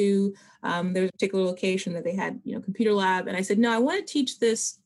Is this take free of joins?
yes; 0 cuts

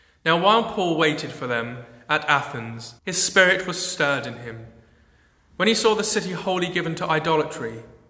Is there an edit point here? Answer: yes; 1 cut; at 3.0 s

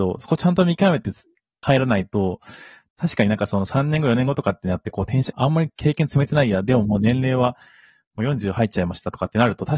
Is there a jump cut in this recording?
yes; 1 cut; at 5.3 s

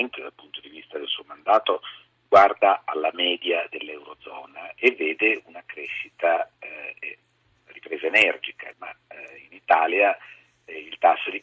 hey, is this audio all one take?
no; 1 cut; at 8.7 s

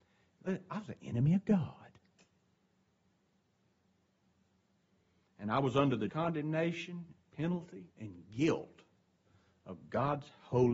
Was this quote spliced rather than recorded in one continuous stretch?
yes; 2 cuts; at 6.1 s, 7.9 s

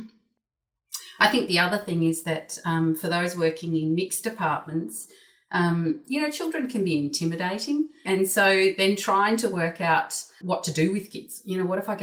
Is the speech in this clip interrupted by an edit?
yes; 2 cuts; at 8.0 s, 10.4 s

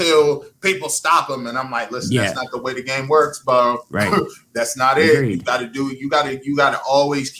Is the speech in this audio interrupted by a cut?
no; 0 cuts

